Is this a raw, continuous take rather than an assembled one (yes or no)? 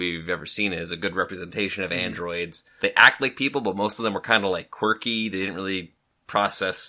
no